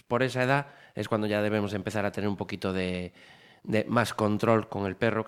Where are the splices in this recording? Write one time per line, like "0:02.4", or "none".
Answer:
none